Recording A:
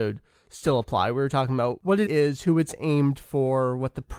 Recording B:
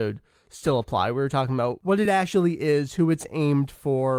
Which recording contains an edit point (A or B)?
A